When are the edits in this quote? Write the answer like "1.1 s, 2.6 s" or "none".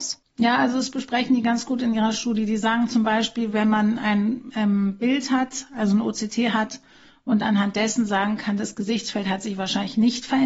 none